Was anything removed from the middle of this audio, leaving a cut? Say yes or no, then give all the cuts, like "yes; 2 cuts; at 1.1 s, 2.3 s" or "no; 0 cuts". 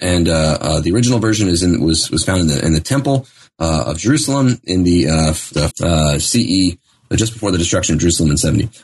yes; 1 cut; at 5.7 s